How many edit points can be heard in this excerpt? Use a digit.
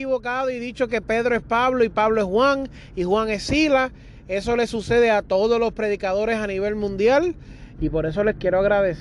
1